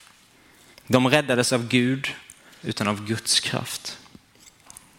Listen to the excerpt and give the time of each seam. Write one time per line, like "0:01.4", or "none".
0:02.6